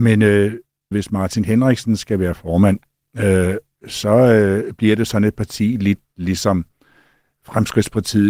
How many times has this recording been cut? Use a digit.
1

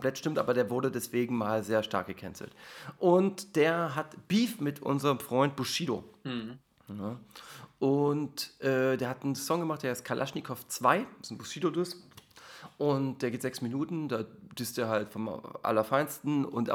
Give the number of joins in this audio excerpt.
0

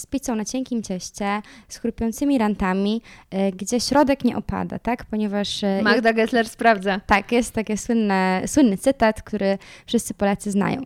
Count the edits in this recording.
0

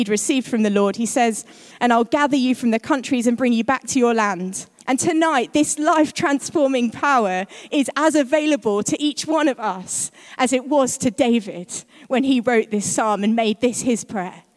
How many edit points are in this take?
2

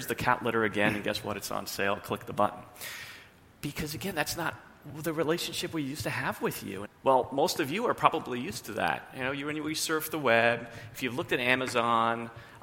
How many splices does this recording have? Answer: 2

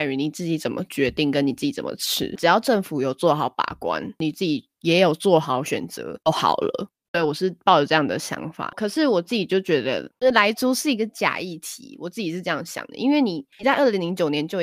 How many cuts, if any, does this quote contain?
0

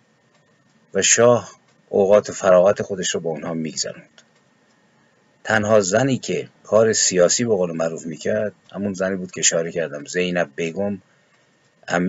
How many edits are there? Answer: 2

